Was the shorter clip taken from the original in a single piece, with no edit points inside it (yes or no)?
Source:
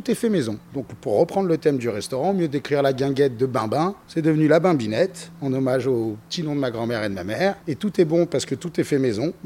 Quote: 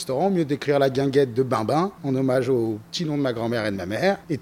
no